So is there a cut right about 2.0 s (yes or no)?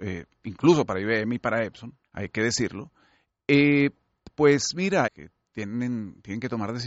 yes